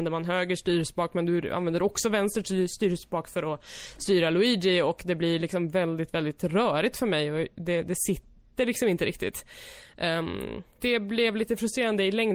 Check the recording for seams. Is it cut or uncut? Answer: cut